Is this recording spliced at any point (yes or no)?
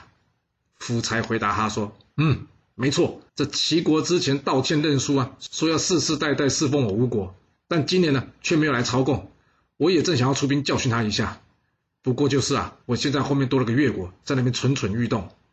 yes